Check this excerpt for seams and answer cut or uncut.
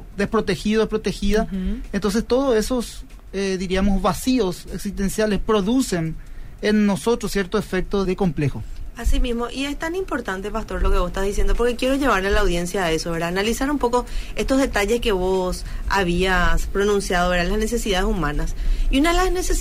cut